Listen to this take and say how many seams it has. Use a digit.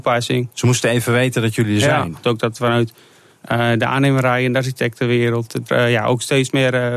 2